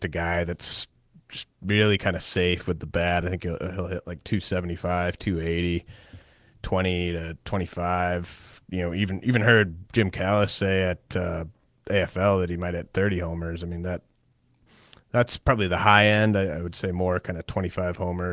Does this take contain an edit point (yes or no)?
no